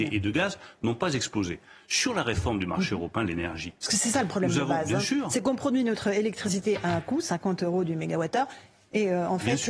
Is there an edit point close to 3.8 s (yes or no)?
no